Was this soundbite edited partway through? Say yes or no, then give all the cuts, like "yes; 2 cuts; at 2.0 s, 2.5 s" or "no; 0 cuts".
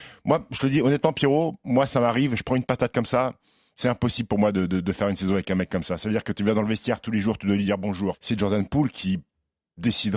yes; 1 cut; at 8.1 s